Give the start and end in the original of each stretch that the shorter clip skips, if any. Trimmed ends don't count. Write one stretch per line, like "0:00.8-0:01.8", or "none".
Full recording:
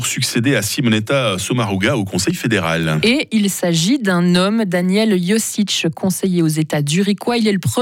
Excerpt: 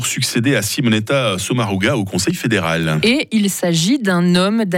none

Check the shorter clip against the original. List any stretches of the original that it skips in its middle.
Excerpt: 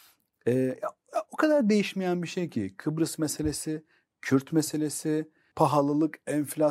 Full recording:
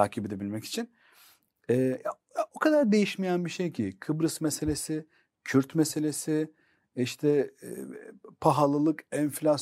0:06.7-0:08.4

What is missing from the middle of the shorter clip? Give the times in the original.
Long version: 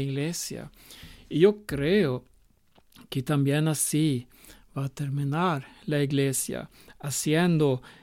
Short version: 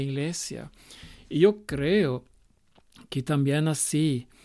none

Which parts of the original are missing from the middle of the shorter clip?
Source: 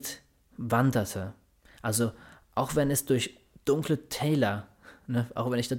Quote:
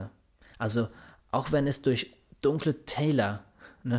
none

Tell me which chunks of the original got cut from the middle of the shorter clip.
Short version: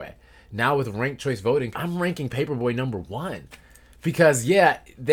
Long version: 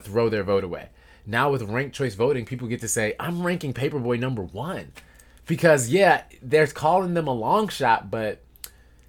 0:02.5-0:03.2

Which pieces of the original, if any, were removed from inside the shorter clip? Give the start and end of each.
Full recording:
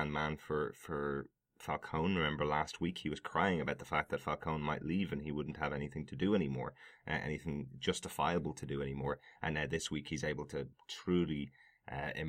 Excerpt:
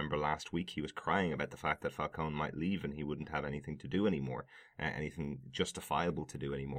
none

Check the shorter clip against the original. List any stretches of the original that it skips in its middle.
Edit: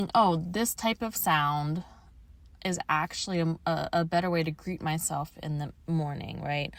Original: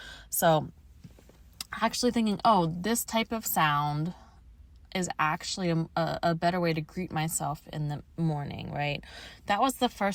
none

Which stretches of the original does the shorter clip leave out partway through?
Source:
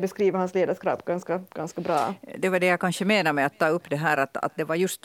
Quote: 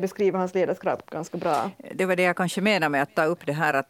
0:01.0-0:01.5

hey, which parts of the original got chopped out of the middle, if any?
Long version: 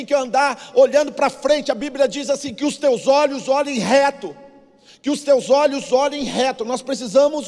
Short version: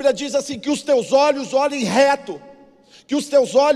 none

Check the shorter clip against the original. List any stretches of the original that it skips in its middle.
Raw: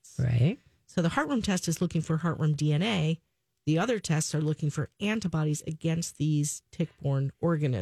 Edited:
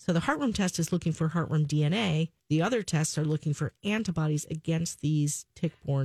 0:03.3-0:03.6

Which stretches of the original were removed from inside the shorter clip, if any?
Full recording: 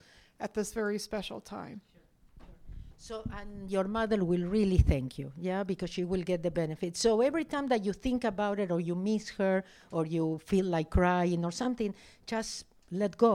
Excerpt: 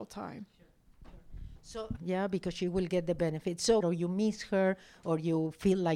0:03.3-0:05.3
0:07.2-0:08.7

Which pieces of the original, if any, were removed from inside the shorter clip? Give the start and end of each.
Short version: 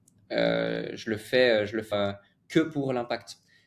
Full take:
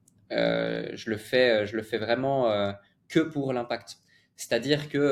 0:01.9-0:02.5

